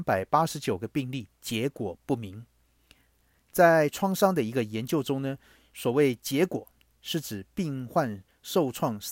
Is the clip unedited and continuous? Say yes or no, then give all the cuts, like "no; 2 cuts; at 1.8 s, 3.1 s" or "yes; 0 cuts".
yes; 0 cuts